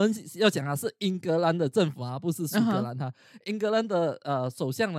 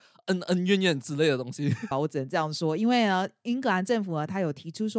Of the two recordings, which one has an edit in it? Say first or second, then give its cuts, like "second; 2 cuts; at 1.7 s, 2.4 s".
second; 1 cut; at 1.9 s